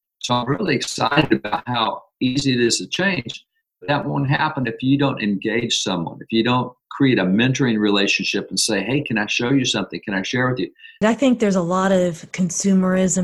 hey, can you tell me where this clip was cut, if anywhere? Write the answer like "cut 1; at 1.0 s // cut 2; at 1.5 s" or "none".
cut 1; at 11.0 s